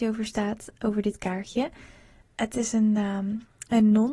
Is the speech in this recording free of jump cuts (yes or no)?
no